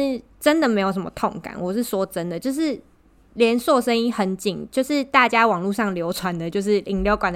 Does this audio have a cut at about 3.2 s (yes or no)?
no